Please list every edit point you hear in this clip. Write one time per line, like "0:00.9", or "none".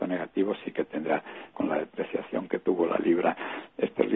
0:01.5